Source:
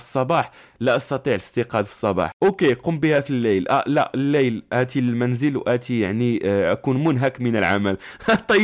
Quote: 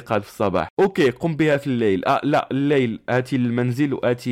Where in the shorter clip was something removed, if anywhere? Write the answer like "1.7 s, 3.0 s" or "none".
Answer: none